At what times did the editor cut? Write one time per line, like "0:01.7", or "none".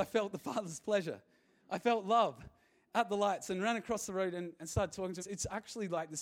0:05.2

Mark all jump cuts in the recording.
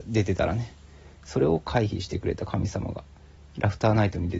0:03.4

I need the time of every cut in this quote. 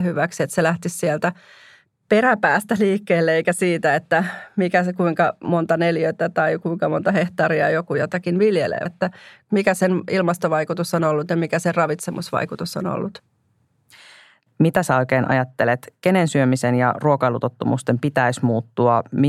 0:08.9

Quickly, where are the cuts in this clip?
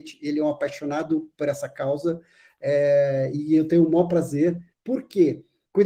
0:04.7

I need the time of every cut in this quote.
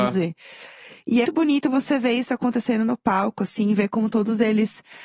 0:01.2

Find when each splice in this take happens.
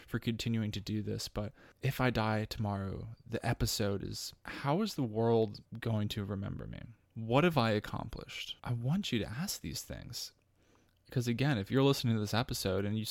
0:08.6

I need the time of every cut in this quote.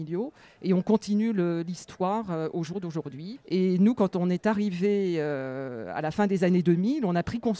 0:03.4

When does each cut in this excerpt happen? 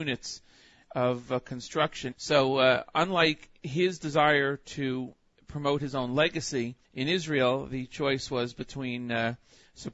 0:02.1
0:06.8

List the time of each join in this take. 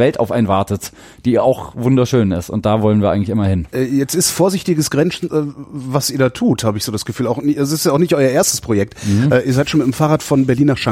0:05.3

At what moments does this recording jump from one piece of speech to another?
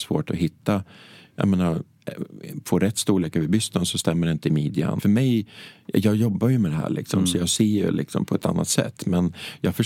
0:05.0

